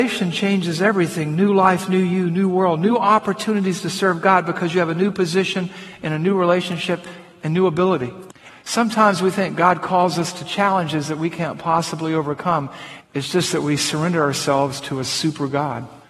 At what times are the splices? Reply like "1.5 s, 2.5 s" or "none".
8.5 s, 13.0 s